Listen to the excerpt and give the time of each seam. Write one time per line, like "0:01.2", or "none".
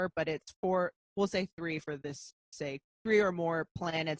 0:01.0